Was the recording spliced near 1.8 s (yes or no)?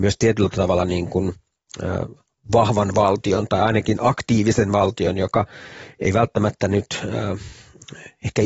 no